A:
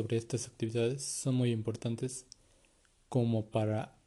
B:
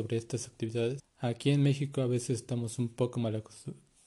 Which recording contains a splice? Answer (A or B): B